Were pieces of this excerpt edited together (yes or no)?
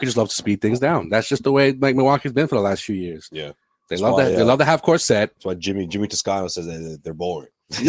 no